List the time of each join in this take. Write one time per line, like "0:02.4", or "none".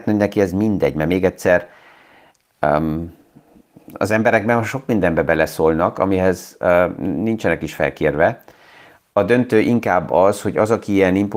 none

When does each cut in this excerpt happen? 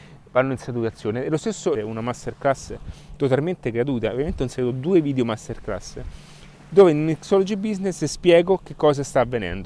0:01.7

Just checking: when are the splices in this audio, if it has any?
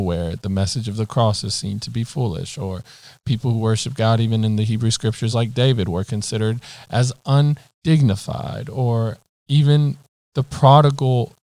none

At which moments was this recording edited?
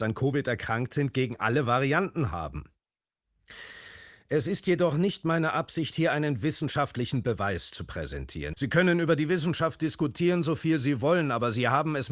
0:08.5

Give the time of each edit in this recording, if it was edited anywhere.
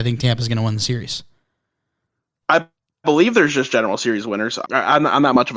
0:04.6

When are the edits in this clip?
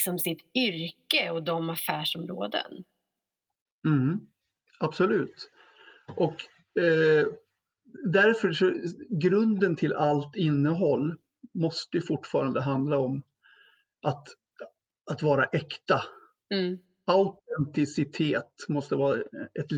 none

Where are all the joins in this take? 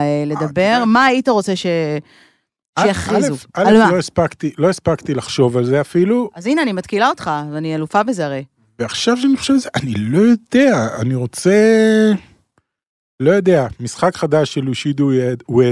none

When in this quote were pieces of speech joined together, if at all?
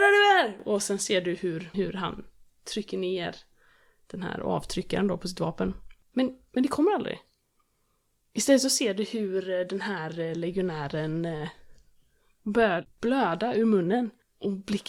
0:01.7
0:06.1

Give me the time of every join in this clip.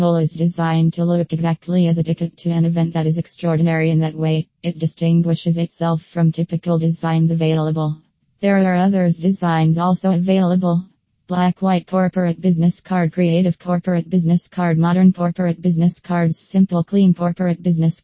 none

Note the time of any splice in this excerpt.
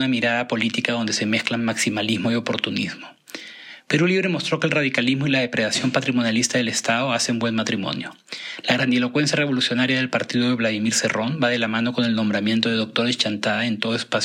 none

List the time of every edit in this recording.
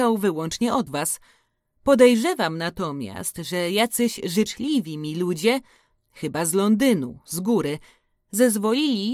none

